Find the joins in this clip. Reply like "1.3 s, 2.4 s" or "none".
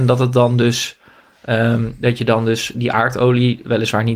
none